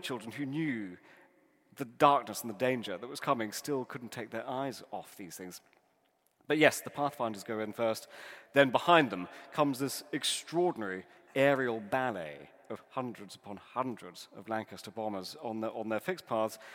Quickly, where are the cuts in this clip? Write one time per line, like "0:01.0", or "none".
none